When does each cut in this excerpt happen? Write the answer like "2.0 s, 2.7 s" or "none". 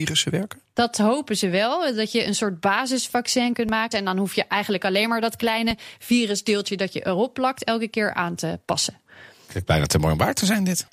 3.9 s

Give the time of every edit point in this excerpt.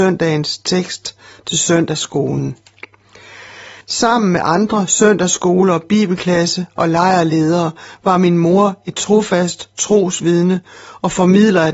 3.8 s

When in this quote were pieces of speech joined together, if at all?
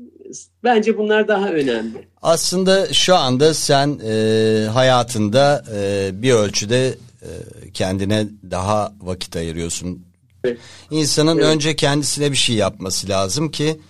10.4 s

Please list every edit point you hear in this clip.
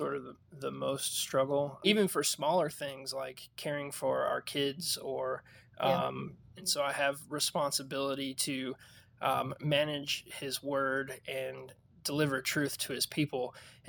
1.8 s, 6.6 s

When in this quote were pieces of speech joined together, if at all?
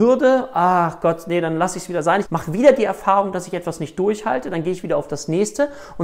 2.2 s

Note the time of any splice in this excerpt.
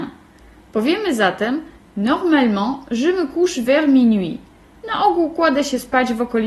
none

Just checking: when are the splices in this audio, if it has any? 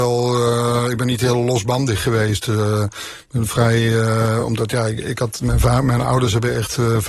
none

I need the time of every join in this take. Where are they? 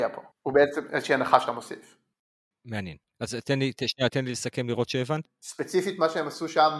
4.1 s, 5.3 s

